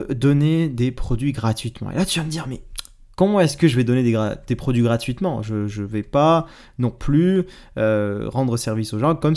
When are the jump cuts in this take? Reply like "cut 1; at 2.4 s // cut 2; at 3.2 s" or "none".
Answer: none